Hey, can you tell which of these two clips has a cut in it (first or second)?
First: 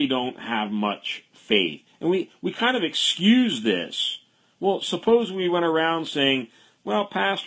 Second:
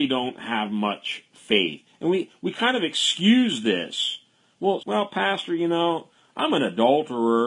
second